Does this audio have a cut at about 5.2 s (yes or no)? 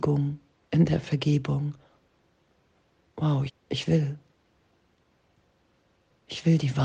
no